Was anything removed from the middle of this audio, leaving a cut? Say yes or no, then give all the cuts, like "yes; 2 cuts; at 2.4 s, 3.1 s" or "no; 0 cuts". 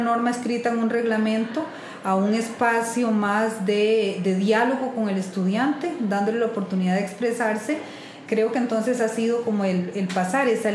yes; 1 cut; at 8.3 s